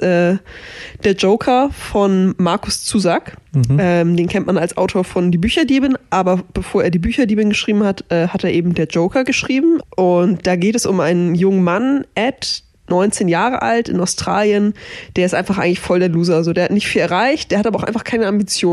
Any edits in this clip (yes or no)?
yes